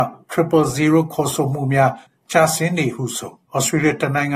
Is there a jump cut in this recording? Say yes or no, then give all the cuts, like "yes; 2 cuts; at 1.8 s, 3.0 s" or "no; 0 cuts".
yes; 1 cut; at 3.4 s